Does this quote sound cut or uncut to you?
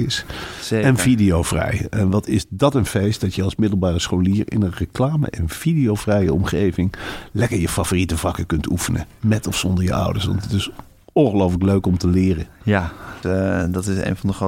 cut